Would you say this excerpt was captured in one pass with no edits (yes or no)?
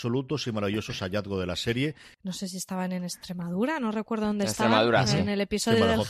no